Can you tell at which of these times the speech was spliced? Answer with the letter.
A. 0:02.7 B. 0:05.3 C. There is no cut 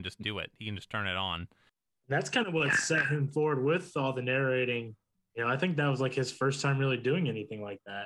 C